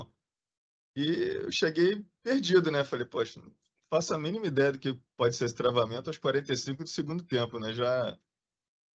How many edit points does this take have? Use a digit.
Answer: 0